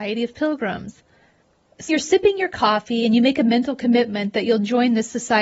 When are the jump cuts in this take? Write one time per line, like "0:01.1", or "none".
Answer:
0:01.9